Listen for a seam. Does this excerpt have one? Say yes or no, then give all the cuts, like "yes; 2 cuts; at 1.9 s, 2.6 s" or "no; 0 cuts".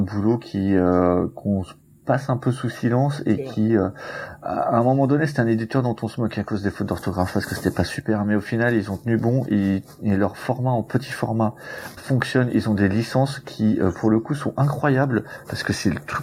yes; 1 cut; at 12.0 s